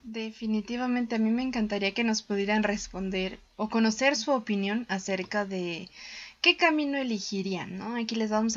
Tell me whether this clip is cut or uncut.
cut